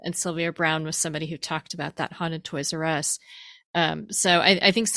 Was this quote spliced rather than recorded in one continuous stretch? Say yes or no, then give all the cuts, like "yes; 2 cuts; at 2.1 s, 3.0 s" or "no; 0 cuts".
no; 0 cuts